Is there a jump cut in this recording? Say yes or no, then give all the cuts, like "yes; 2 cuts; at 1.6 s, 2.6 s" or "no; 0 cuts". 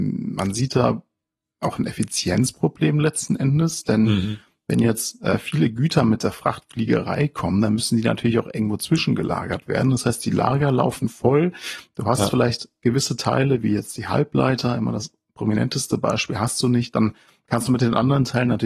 no; 0 cuts